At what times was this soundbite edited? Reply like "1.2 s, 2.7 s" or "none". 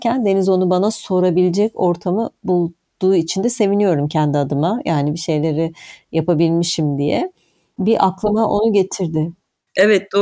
none